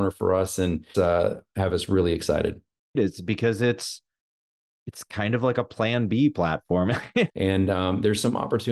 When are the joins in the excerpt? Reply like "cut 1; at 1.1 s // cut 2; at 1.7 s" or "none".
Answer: cut 1; at 0.9 s // cut 2; at 3.0 s // cut 3; at 7.3 s